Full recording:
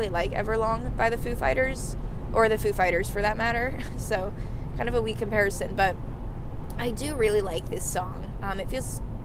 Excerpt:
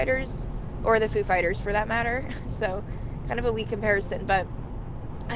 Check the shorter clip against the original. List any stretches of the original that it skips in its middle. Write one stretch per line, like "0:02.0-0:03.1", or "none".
none